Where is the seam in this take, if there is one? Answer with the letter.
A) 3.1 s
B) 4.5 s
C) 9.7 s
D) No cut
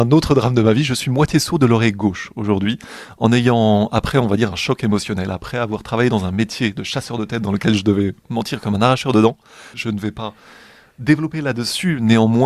C